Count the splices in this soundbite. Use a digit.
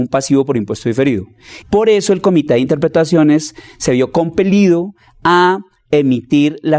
1